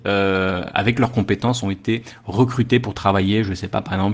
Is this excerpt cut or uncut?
uncut